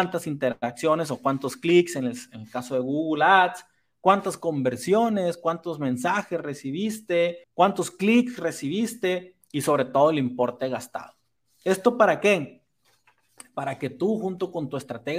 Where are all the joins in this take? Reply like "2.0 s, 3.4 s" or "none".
7.4 s

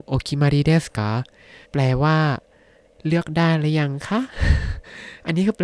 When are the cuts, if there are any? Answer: 1.6 s

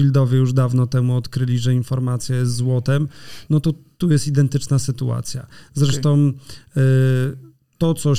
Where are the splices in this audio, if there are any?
none

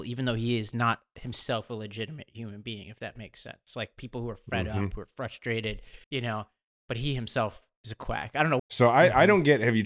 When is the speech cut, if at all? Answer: 6.0 s, 8.6 s

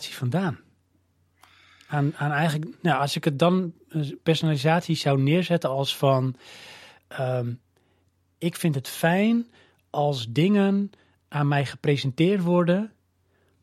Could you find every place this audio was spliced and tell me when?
none

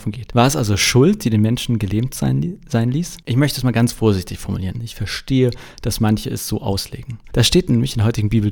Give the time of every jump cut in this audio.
3.2 s, 4.7 s, 7.2 s

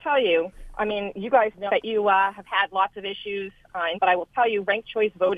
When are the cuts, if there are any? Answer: 1.7 s, 3.9 s

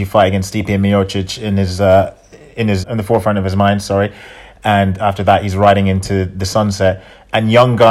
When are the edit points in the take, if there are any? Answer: 2.8 s

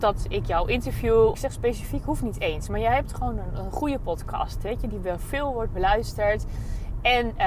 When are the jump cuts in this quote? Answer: 1.3 s

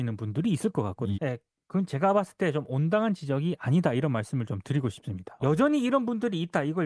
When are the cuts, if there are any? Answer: 1.1 s, 5.4 s

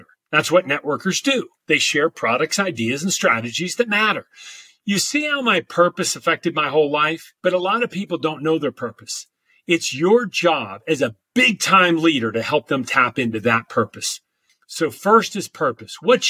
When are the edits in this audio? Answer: 7.4 s

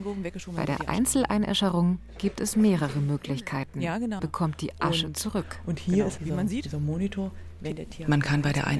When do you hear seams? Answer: 4.2 s, 6.2 s

